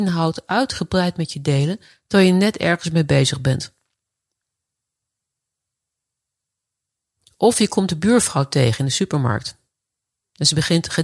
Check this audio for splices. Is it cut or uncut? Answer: uncut